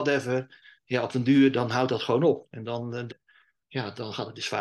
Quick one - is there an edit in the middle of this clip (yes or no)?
yes